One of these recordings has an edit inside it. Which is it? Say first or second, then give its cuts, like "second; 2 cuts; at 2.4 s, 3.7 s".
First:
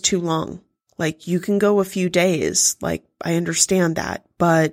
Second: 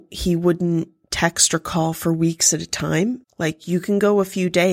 second; 1 cut; at 3.2 s